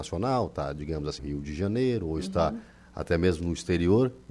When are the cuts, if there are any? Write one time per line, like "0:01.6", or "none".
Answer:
0:01.2